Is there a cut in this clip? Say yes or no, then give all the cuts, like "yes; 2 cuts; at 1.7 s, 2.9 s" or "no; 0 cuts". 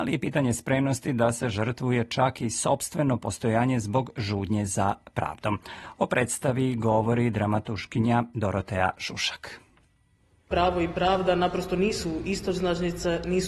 no; 0 cuts